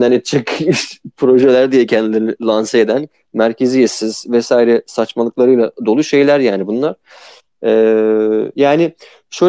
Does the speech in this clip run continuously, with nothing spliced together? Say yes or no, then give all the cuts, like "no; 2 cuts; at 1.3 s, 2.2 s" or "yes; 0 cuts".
yes; 0 cuts